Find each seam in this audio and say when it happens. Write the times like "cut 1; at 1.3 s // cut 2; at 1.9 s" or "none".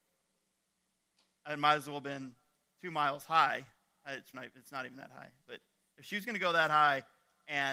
cut 1; at 4.3 s